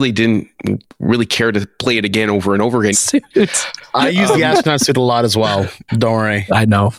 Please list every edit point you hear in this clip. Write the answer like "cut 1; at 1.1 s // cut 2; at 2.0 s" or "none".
cut 1; at 2.9 s